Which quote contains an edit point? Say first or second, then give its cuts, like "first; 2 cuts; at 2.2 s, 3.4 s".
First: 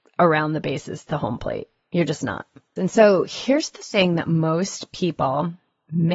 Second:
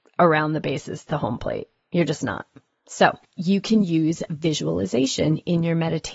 first; 1 cut; at 2.8 s